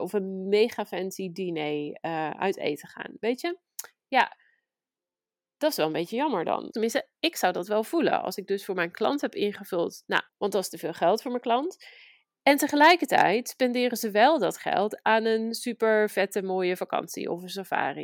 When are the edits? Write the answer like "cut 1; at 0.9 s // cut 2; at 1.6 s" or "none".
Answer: cut 1; at 6.7 s // cut 2; at 10.3 s